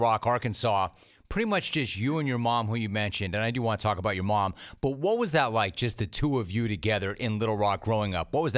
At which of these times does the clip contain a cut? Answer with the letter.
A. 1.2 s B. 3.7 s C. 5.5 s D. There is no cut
D